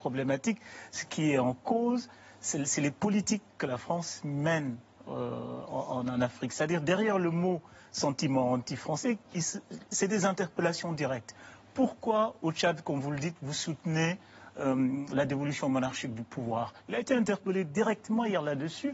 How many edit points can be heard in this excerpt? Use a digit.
1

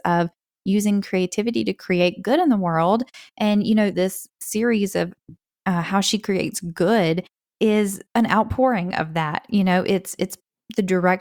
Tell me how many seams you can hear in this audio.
2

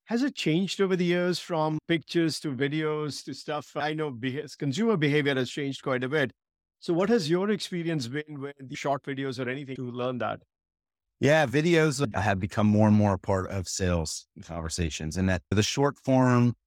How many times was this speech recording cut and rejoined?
2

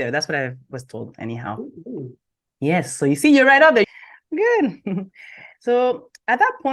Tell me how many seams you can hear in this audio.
1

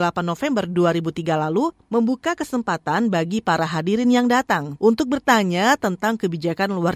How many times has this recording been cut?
1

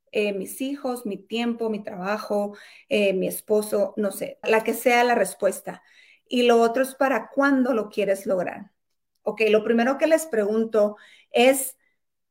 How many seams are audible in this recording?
2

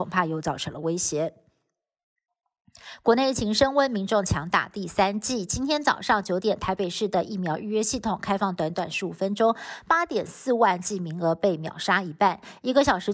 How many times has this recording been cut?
0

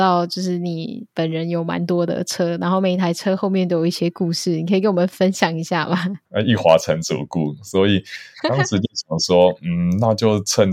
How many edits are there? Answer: 1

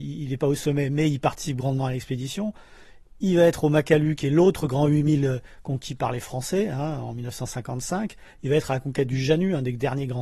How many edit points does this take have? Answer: 0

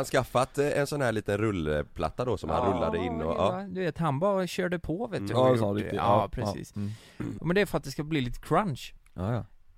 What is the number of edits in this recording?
2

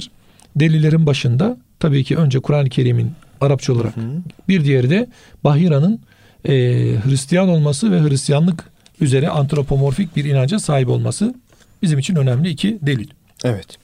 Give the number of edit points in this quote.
1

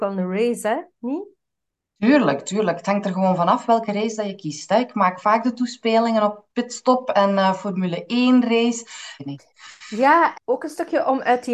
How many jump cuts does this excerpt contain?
2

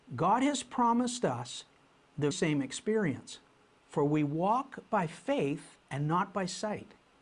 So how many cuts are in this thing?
3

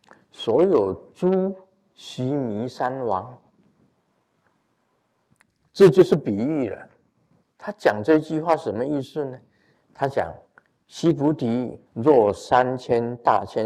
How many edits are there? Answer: 3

